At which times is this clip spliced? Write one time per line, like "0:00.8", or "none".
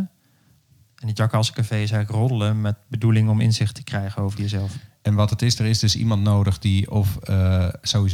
0:04.9